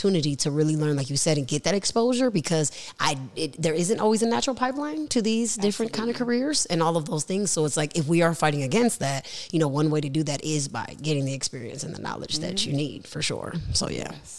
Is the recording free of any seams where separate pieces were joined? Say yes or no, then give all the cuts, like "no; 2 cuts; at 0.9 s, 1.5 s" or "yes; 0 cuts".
yes; 0 cuts